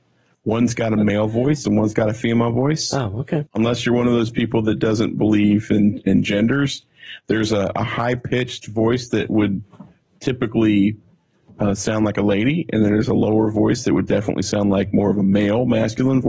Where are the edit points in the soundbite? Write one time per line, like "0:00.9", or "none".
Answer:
0:03.5